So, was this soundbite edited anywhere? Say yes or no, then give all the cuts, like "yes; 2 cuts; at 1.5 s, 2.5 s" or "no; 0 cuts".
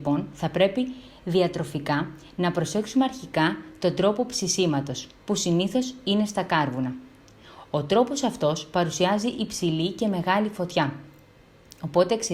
no; 0 cuts